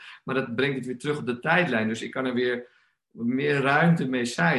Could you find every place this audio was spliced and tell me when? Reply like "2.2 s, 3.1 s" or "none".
none